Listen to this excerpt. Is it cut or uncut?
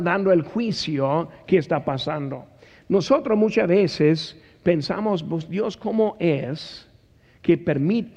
uncut